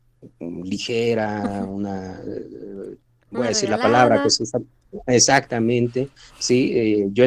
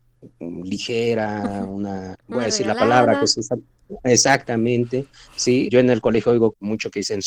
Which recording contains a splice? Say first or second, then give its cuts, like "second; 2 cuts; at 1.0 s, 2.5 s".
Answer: second; 2 cuts; at 2.1 s, 5.7 s